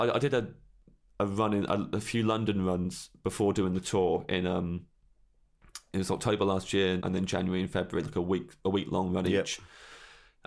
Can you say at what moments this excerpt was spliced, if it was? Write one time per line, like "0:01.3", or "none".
0:07.0